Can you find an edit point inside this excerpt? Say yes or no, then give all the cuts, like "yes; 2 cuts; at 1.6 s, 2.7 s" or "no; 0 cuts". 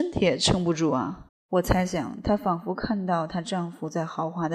yes; 1 cut; at 1.3 s